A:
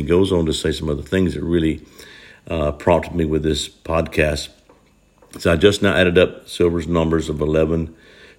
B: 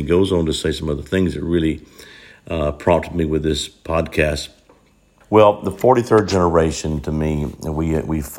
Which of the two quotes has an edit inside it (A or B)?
B